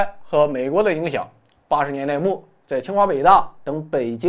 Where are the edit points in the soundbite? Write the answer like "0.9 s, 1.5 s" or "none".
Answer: none